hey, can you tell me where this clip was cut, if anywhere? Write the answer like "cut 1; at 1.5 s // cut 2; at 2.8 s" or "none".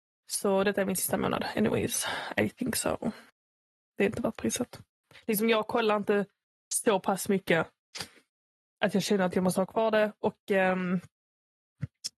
none